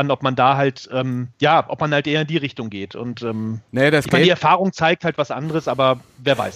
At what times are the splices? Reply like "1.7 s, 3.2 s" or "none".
3.7 s